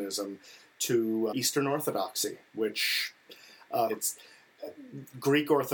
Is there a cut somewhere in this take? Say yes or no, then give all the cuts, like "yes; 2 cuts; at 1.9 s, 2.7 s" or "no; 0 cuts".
yes; 2 cuts; at 1.3 s, 3.9 s